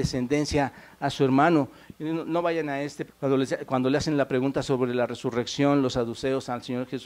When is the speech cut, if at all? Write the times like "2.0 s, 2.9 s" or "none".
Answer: 1.9 s, 3.1 s